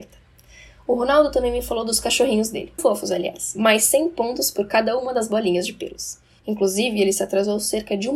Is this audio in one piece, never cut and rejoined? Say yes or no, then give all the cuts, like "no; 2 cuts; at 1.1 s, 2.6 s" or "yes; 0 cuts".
no; 2 cuts; at 2.8 s, 6.4 s